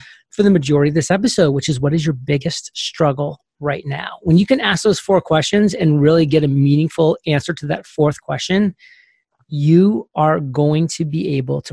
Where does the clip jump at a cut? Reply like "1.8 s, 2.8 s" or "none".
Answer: none